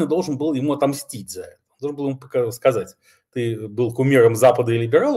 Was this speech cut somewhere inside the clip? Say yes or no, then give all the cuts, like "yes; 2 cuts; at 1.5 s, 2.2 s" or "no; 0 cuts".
no; 0 cuts